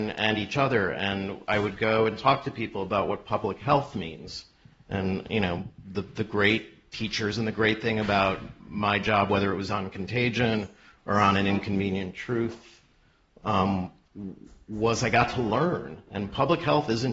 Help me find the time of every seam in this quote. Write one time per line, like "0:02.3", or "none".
0:16.1